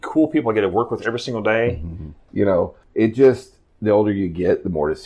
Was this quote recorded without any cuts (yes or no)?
no